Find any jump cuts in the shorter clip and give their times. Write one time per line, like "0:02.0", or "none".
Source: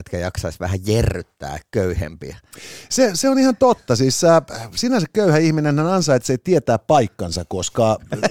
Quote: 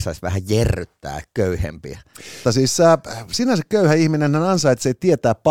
0:02.4